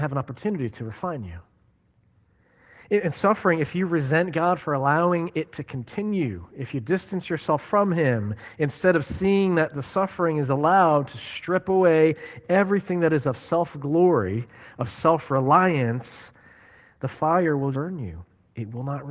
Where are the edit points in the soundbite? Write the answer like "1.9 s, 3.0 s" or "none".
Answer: 17.7 s